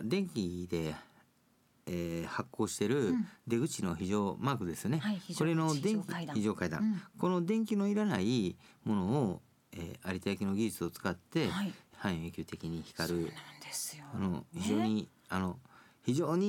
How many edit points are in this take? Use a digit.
0